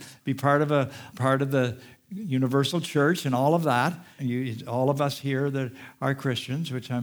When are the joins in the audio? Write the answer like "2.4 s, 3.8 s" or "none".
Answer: 1.1 s, 4.2 s